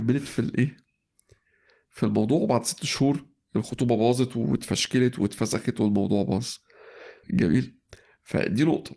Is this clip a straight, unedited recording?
no; 1 cut; at 7.2 s

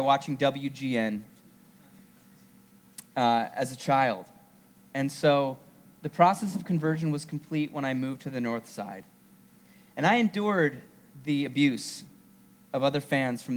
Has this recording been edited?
no; 0 cuts

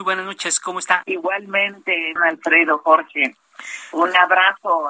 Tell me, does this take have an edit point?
yes; 2 cuts; at 1.0 s, 2.2 s

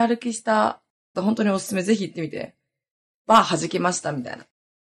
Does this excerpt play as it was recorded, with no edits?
no; 1 cut; at 1.1 s

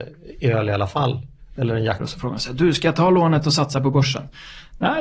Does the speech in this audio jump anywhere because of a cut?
yes; 1 cut; at 2.0 s

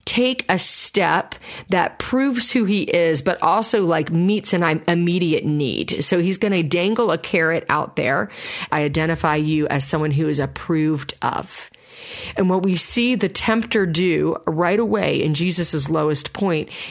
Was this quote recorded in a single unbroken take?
no; 1 cut; at 8.7 s

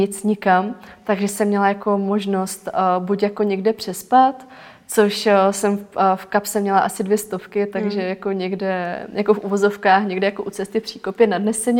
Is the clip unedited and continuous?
yes; 0 cuts

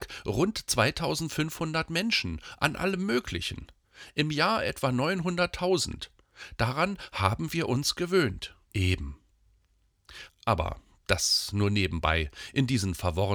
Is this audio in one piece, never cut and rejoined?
no; 2 cuts; at 8.6 s, 10.3 s

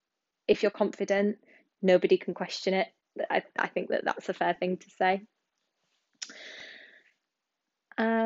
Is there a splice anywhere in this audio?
no; 0 cuts

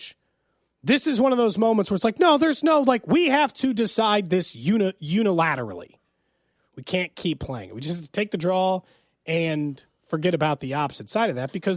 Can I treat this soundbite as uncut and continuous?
no; 1 cut; at 6.6 s

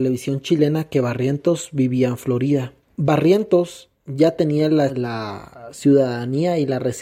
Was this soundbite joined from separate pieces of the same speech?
yes; 2 cuts; at 2.9 s, 4.9 s

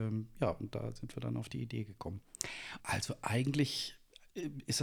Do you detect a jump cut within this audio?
yes; 1 cut; at 2.8 s

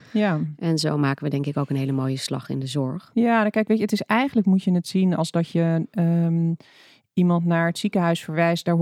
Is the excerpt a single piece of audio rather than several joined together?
yes; 0 cuts

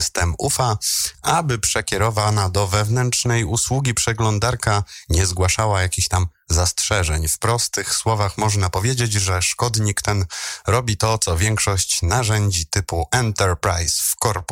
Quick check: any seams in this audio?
no; 0 cuts

